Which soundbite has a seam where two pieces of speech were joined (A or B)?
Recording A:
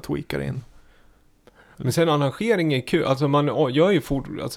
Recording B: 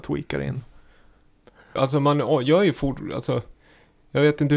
B